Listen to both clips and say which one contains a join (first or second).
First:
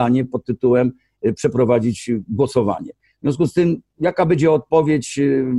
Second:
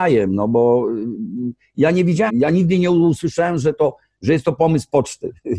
second